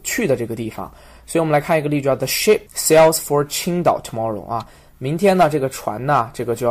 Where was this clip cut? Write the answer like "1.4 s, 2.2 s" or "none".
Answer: 2.7 s